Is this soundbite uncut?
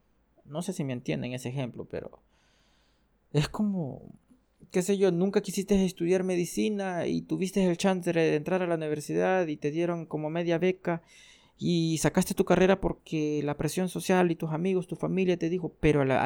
yes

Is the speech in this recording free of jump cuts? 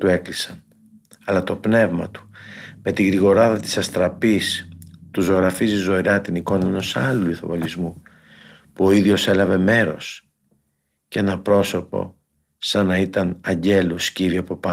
yes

